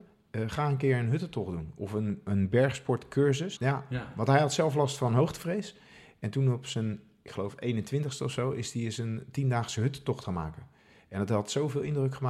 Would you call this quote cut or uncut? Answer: cut